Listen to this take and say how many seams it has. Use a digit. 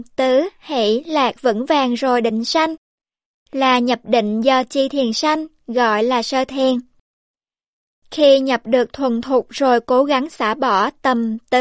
0